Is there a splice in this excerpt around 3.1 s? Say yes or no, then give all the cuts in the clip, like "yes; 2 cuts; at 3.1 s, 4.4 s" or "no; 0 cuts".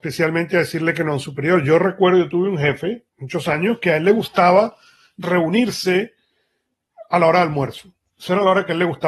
yes; 1 cut; at 3.1 s